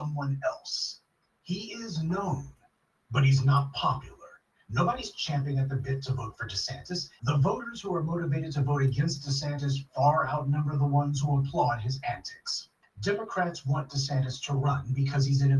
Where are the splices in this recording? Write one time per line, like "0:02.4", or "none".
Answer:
0:07.2
0:12.8